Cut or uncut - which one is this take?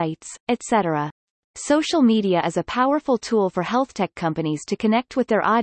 cut